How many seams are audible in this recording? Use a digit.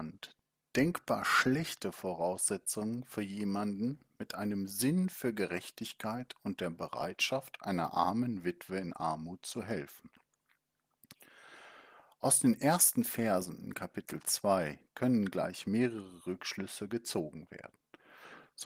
1